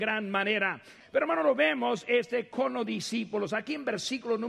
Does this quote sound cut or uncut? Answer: cut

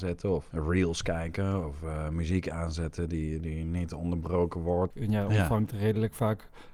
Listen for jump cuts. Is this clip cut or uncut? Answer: cut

